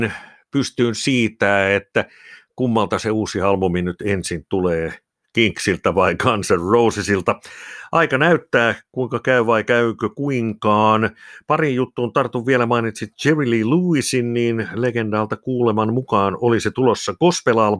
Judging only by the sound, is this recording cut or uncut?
uncut